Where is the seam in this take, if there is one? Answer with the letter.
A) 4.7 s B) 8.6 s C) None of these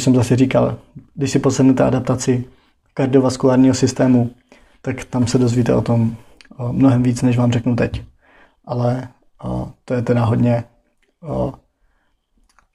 C